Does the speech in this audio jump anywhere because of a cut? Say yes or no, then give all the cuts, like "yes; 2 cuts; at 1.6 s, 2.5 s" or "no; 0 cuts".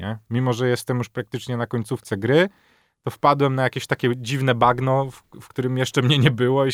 no; 0 cuts